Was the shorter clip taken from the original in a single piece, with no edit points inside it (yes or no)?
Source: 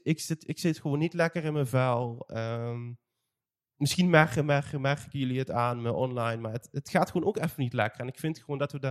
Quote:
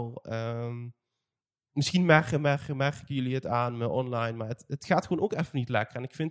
yes